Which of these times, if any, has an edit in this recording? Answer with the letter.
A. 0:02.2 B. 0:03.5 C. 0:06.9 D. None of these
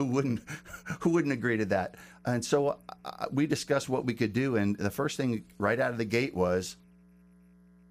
D